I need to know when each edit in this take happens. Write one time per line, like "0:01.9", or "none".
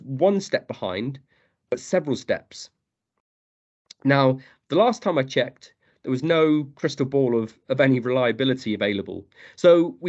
none

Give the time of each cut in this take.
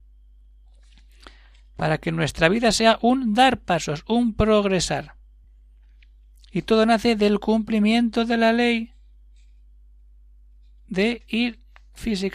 none

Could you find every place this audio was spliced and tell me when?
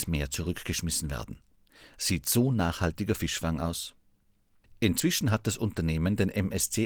none

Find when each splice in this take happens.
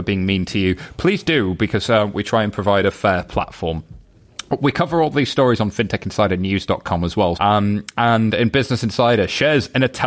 0:07.4

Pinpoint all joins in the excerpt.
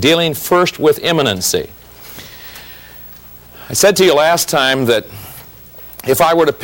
none

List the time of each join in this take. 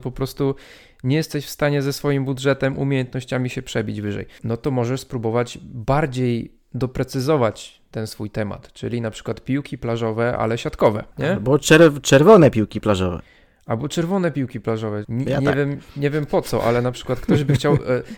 0:15.0

